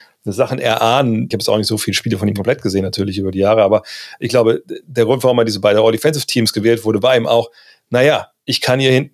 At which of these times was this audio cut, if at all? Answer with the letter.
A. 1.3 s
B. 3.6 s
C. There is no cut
A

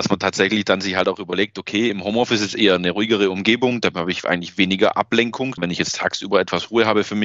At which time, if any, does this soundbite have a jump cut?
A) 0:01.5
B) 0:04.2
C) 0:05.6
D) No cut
C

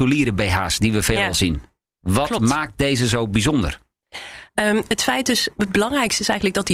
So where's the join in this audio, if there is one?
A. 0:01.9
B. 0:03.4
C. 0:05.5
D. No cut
C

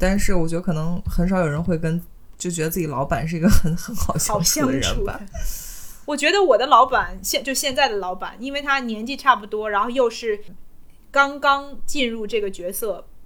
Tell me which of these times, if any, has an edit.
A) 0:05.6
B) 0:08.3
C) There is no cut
C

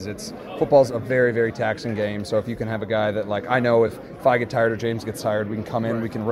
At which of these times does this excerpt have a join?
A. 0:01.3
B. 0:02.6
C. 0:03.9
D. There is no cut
D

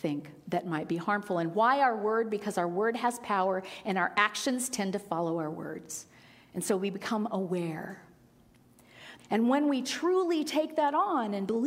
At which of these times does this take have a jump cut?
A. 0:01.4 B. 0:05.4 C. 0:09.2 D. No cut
C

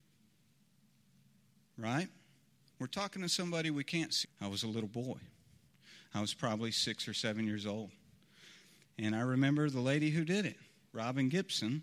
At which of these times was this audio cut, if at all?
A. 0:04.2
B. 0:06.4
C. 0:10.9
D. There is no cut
A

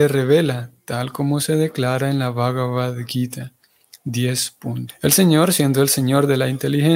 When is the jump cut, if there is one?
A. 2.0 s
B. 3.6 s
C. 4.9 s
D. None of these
C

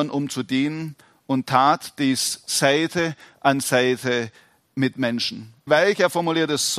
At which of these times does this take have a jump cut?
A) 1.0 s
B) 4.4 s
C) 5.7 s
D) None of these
C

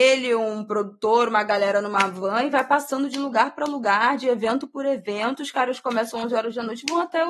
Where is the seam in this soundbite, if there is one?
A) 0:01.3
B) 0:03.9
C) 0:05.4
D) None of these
D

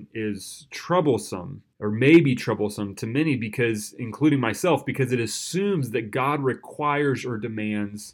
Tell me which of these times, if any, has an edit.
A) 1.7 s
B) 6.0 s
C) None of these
A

